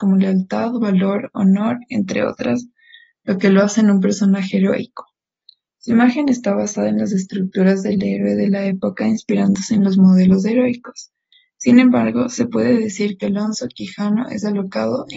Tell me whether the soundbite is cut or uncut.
uncut